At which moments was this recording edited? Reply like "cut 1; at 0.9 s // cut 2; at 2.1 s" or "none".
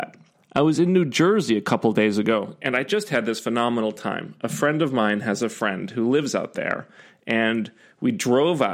none